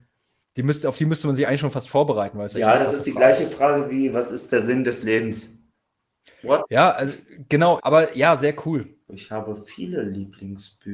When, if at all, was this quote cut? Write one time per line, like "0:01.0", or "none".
0:07.8
0:09.1